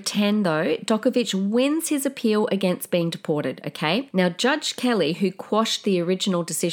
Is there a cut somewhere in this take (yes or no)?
yes